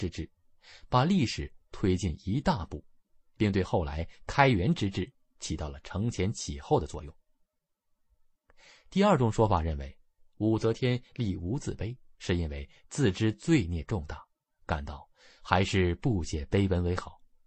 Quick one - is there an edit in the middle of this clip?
no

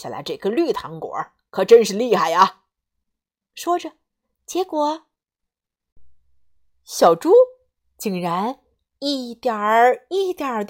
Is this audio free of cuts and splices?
no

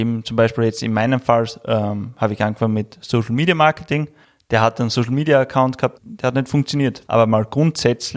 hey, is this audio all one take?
no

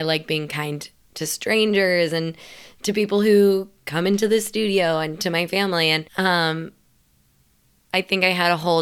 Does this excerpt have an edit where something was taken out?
yes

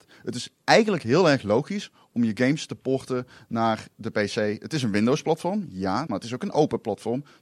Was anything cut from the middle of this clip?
yes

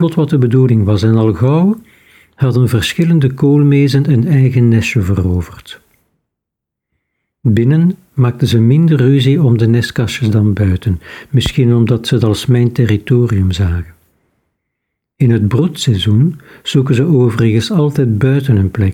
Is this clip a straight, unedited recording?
yes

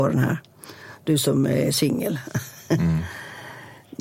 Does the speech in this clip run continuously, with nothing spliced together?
yes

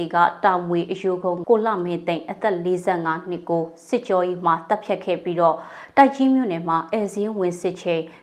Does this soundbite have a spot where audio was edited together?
yes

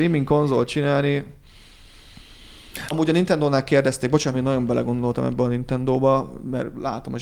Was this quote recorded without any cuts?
no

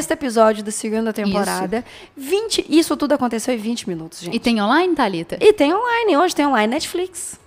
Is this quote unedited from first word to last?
yes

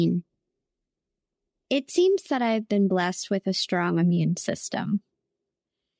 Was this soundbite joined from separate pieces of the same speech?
no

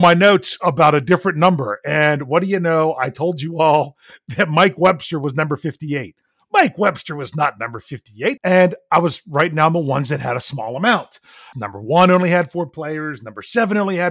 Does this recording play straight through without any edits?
no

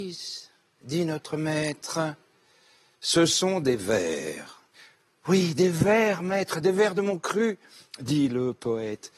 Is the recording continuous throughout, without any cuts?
yes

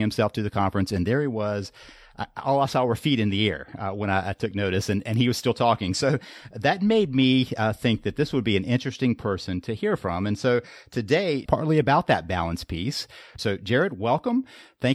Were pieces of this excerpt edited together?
yes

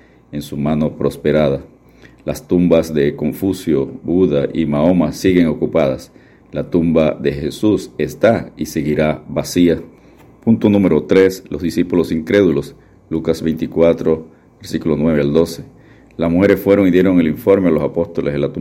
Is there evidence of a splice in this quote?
no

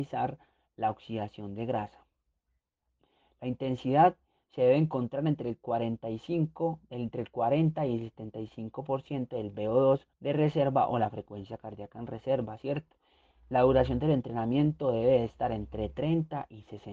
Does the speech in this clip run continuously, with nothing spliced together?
no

